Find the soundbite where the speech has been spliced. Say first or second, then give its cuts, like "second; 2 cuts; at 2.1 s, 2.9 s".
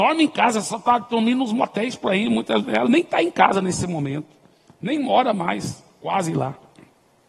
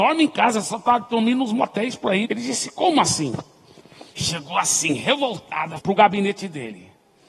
second; 3 cuts; at 2.2 s, 4.1 s, 5.8 s